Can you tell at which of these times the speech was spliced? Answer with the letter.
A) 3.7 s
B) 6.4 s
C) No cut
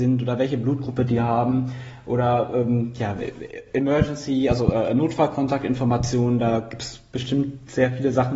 C